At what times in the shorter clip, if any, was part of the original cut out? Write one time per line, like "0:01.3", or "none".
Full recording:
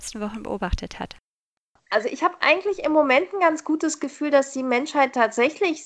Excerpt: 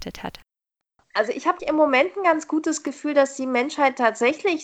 0:01.6